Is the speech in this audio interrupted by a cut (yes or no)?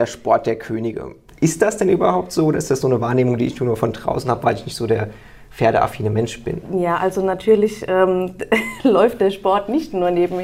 no